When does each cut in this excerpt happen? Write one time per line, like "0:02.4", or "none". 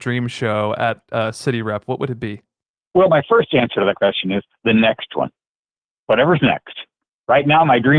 none